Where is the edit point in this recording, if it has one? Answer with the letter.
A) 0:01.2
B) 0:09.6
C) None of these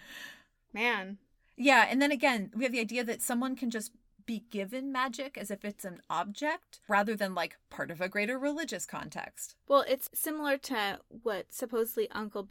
C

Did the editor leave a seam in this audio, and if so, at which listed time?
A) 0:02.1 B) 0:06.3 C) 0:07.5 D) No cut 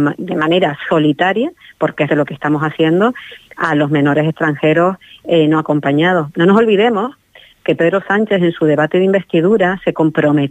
A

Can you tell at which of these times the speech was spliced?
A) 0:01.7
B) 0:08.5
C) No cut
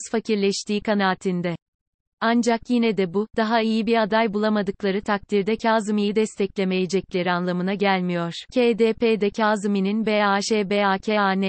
B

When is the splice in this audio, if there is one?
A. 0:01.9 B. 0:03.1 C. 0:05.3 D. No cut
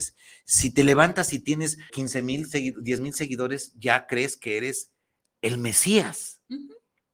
A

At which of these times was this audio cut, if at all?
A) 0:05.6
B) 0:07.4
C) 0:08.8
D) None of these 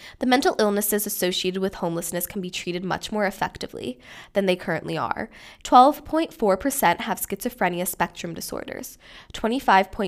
A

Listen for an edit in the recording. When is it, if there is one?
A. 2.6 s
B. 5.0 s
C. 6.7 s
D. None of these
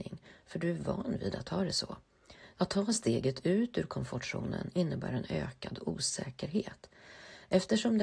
A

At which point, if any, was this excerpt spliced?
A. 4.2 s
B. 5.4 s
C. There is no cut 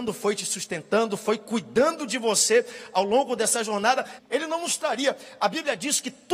A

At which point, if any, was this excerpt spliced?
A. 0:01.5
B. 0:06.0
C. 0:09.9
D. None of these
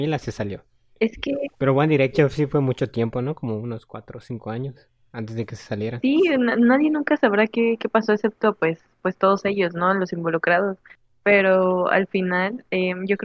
B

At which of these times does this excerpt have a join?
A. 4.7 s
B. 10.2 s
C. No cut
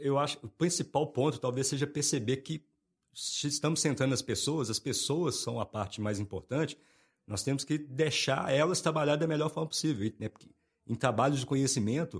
B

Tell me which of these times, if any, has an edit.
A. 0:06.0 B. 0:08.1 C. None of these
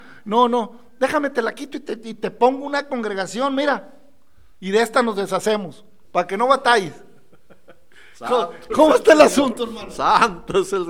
A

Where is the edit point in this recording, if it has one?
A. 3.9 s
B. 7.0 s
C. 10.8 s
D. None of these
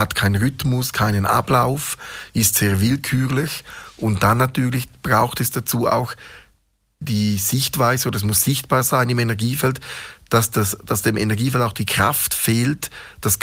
B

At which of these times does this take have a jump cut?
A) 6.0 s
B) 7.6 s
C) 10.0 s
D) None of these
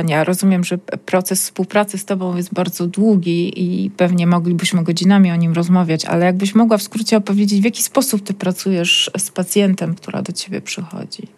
C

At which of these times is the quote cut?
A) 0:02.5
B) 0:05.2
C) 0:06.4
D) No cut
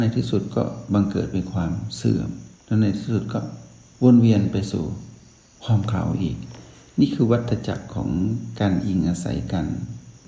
A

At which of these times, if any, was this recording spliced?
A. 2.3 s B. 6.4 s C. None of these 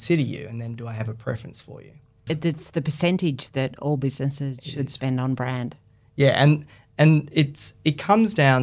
A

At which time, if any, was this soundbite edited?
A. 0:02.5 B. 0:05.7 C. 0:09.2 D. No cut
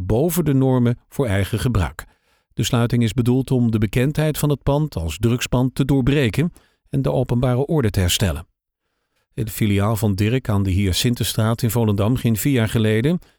C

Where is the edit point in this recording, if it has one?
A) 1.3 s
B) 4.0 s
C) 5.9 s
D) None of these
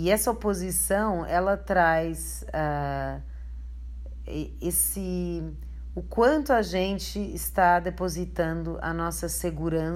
D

